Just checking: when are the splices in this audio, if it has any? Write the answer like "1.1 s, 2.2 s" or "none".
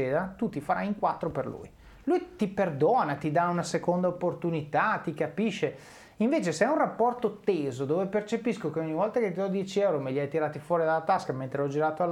2.0 s